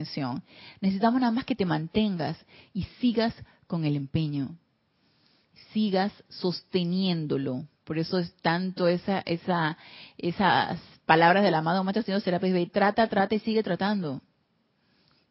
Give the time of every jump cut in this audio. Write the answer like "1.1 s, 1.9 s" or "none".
none

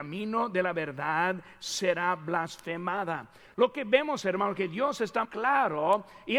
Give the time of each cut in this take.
5.2 s

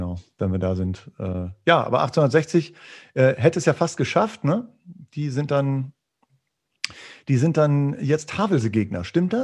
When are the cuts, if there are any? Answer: none

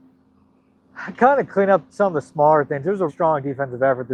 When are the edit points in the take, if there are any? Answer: 3.1 s

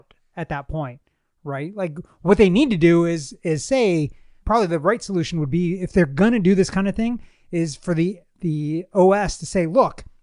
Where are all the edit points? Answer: 4.4 s

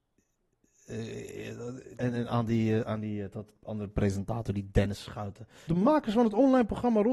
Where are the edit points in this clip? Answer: 2.0 s, 5.7 s

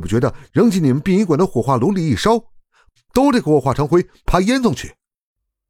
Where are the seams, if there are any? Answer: 3.0 s

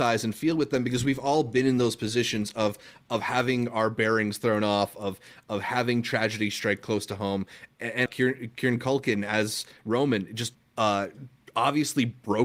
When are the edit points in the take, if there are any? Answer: 8.1 s, 10.5 s

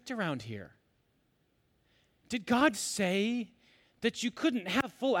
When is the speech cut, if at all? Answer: 2.7 s

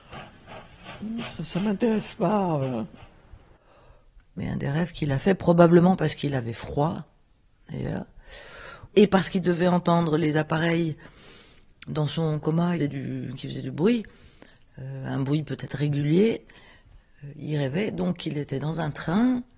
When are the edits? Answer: 4.2 s, 12.8 s

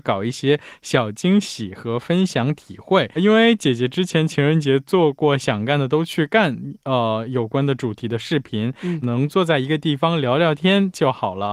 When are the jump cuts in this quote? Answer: 3.2 s, 9.0 s

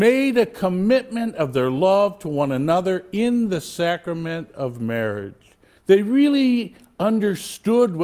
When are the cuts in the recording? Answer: 5.8 s

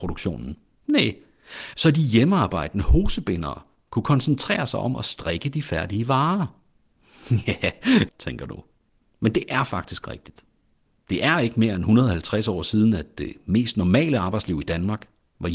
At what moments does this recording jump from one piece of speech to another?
1.7 s, 8.1 s

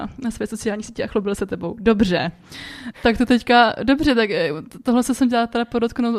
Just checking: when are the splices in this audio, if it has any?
2.9 s

